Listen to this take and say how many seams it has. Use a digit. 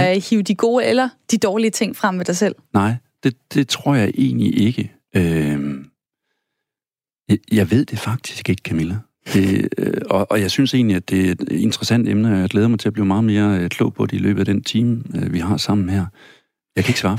0